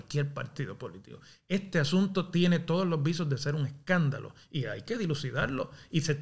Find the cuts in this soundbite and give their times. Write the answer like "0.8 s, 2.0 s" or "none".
none